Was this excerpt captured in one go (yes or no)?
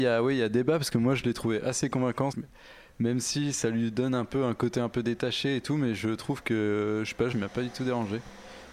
no